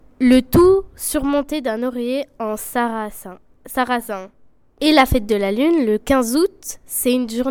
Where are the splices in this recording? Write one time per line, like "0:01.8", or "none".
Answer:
0:04.8